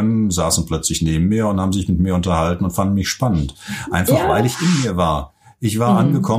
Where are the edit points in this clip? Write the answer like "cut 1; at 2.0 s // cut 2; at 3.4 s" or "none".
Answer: none